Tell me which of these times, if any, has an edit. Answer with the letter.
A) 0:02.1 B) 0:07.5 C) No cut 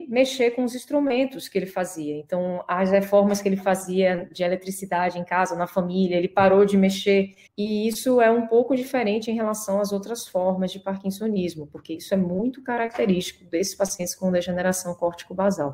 B